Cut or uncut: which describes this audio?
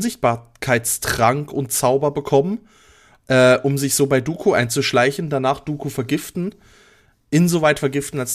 uncut